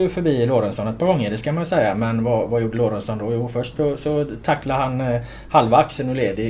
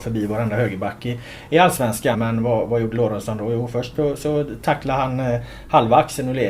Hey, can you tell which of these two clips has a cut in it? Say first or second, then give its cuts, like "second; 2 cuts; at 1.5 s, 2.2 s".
second; 1 cut; at 2.1 s